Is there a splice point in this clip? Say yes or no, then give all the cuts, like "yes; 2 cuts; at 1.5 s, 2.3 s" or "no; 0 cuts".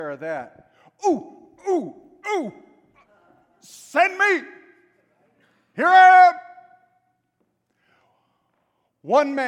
no; 0 cuts